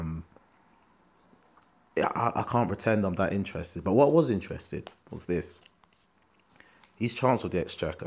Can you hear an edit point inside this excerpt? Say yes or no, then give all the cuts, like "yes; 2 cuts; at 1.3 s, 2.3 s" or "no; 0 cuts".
no; 0 cuts